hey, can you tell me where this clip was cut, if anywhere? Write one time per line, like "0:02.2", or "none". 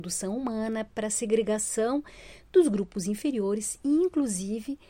none